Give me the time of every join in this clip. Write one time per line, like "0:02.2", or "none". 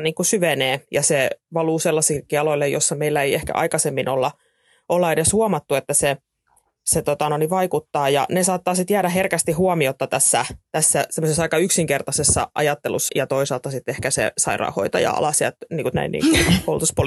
0:13.1
0:15.9